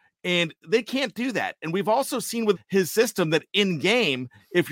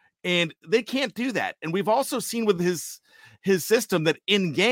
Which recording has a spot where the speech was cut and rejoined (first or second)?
first